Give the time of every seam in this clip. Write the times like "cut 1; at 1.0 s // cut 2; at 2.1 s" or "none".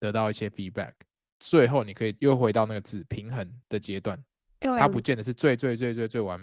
none